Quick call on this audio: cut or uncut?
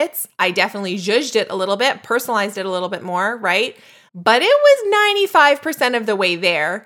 cut